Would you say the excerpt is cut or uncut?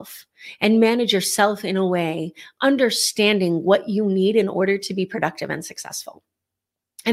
uncut